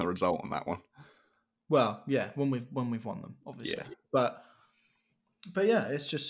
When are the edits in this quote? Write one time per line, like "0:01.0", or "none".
none

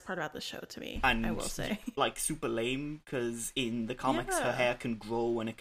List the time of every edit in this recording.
0:01.9

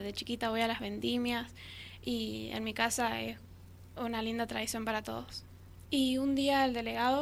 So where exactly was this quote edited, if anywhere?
0:05.9

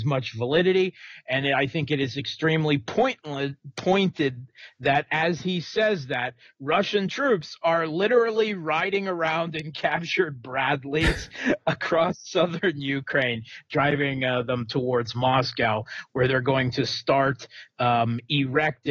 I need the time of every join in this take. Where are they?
none

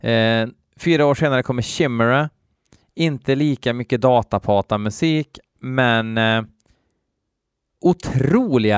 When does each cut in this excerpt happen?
none

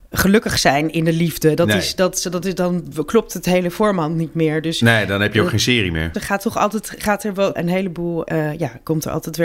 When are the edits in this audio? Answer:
0:06.1
0:07.6

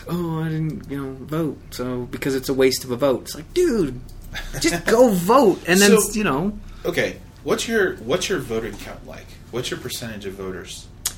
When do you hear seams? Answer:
none

